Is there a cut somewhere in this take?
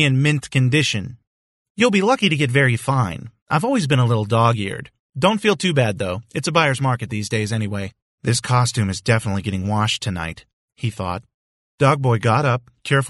yes; 1 cut; at 8.1 s

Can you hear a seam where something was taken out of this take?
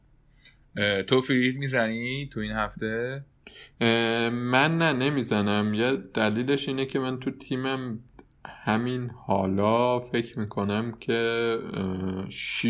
no; 0 cuts

